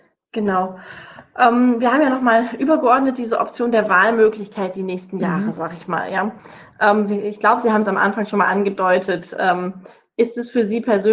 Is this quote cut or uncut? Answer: uncut